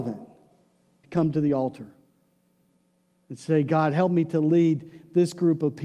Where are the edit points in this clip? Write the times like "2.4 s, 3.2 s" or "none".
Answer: 1.0 s